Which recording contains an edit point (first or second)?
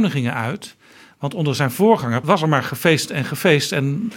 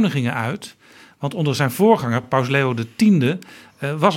first